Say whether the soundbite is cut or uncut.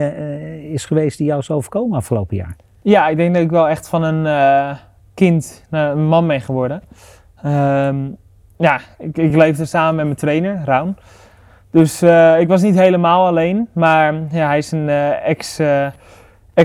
uncut